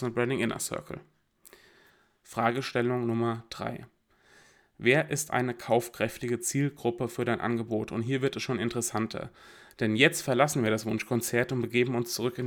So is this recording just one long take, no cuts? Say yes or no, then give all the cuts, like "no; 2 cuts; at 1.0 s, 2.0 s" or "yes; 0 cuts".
yes; 0 cuts